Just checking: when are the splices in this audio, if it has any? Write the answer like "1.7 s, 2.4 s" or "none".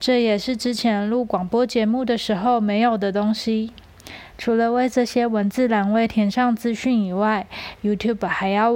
4.3 s